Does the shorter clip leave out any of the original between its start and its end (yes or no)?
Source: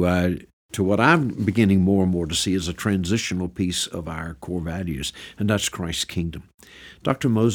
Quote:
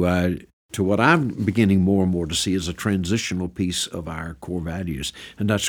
no